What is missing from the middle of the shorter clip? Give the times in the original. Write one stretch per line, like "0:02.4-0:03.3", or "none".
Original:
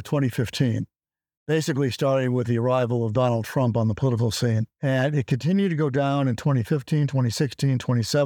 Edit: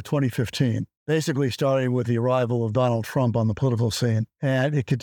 0:00.9-0:01.3